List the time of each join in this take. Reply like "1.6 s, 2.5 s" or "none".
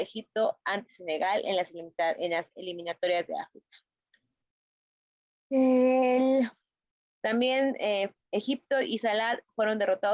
7.1 s, 8.2 s